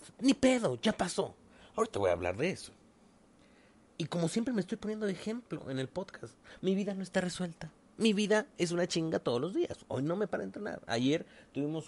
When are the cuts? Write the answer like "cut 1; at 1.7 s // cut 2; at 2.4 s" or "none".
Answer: cut 1; at 6.6 s